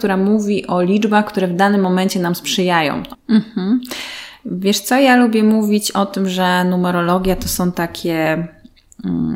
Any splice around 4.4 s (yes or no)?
no